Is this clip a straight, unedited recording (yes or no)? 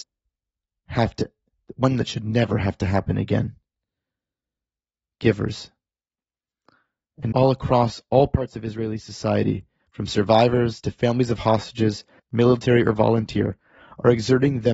no